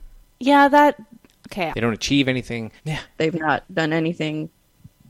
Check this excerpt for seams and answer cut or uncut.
cut